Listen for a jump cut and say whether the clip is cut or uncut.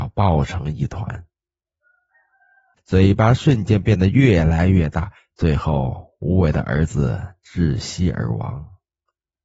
cut